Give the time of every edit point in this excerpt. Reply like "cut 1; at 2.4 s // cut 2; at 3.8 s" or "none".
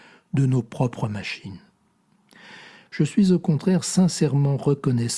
cut 1; at 2.9 s